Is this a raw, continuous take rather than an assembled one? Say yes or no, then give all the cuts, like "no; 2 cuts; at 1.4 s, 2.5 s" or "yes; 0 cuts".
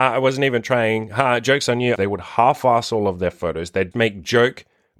no; 2 cuts; at 2.0 s, 3.9 s